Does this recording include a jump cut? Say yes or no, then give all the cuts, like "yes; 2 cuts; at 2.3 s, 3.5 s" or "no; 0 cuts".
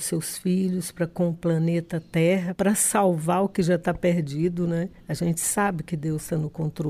no; 0 cuts